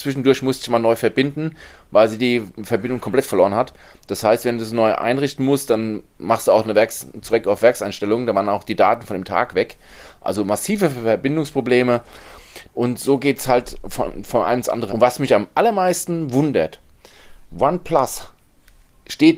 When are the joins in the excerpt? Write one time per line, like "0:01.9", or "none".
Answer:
0:12.7
0:14.9